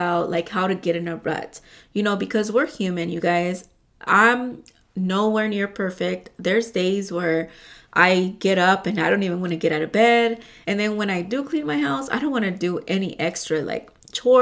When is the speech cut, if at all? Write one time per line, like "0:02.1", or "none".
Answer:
0:10.6